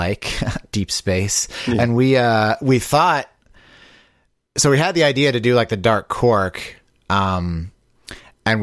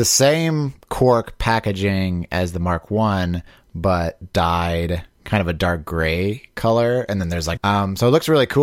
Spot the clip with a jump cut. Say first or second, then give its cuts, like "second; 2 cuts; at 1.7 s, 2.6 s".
second; 1 cut; at 7.6 s